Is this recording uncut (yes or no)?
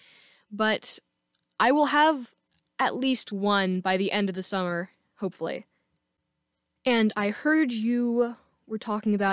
yes